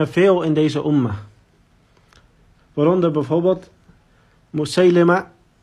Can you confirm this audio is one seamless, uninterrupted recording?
no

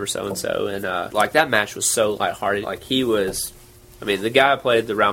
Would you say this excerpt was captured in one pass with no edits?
no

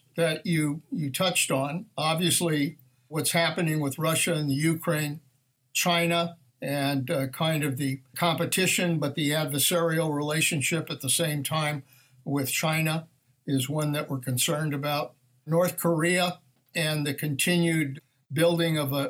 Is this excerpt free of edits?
no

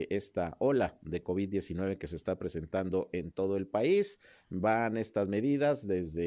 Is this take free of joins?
yes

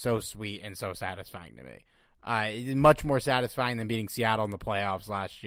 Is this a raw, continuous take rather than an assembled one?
yes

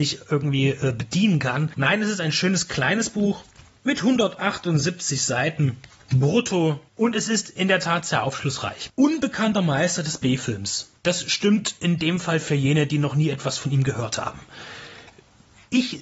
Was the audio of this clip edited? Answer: yes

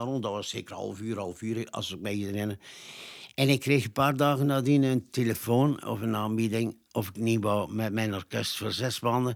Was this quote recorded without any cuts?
yes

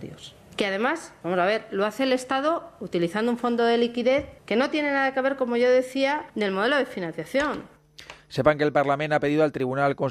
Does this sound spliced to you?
no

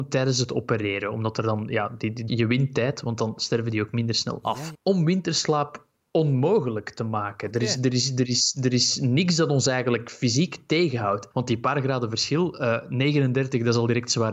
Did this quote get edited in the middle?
yes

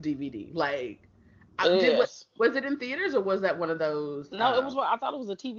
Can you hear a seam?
no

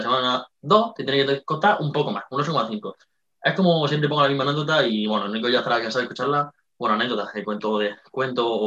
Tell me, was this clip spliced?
no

